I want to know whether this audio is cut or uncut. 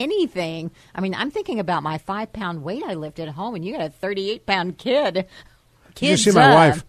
uncut